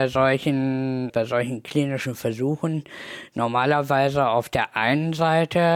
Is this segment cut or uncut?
cut